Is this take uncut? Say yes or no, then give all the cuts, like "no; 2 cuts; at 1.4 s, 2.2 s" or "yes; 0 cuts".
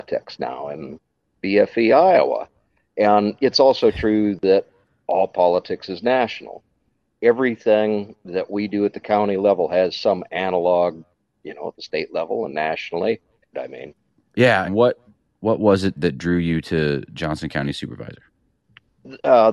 no; 3 cuts; at 13.5 s, 14.6 s, 15.9 s